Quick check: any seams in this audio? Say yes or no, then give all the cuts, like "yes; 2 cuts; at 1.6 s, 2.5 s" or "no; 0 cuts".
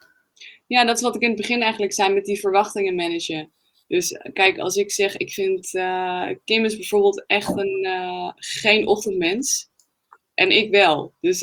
no; 0 cuts